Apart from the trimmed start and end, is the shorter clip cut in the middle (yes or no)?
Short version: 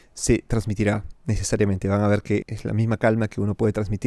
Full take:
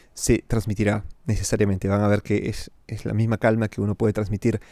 yes